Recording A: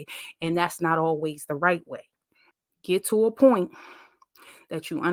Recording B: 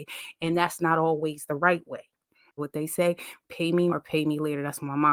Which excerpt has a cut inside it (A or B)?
B